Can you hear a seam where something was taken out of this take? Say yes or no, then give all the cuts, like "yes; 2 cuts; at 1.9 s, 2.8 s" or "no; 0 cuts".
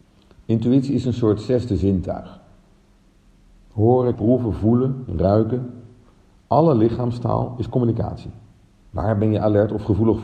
yes; 2 cuts; at 4.1 s, 8.8 s